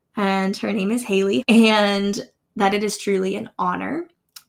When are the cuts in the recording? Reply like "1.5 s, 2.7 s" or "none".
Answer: 1.4 s